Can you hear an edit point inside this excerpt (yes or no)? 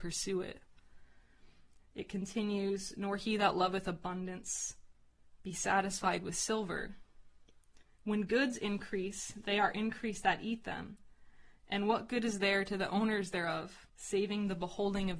yes